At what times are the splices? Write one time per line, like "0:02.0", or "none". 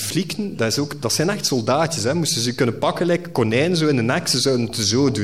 none